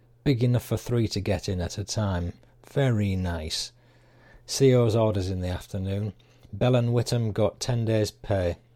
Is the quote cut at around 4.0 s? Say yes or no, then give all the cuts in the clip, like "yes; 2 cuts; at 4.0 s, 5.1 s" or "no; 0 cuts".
no; 0 cuts